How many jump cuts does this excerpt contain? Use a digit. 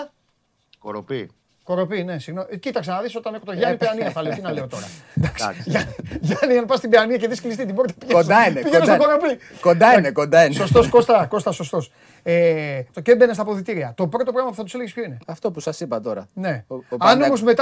2